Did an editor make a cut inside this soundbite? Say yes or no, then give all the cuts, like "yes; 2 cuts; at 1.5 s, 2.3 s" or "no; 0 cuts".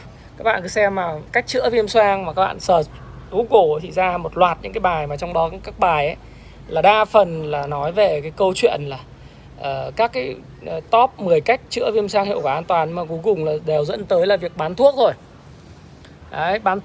no; 0 cuts